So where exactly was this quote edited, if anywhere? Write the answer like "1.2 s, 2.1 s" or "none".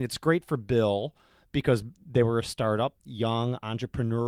none